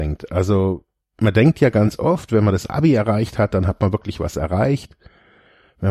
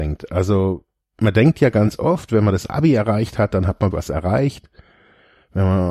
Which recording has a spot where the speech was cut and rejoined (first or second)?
second